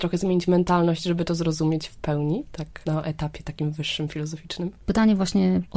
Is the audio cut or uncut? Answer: uncut